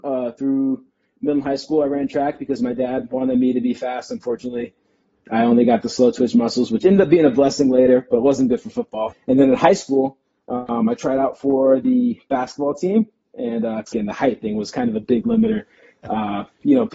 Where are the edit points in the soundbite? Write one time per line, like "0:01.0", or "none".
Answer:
0:09.1
0:13.9